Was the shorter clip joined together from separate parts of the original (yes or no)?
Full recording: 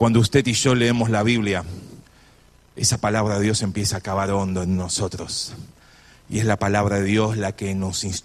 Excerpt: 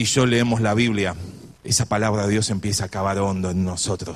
yes